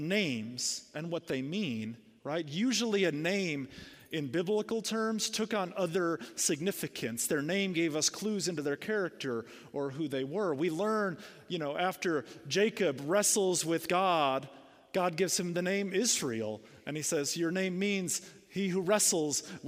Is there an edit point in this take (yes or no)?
no